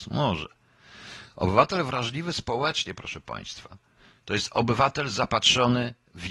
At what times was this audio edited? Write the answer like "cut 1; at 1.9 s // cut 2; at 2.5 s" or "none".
none